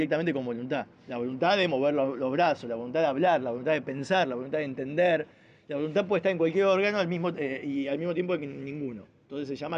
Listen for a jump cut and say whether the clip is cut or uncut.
uncut